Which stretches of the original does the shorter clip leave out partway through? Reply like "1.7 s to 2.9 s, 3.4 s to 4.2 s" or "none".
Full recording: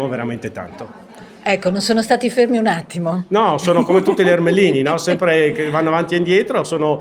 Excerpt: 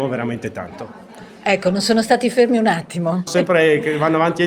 3.3 s to 5.0 s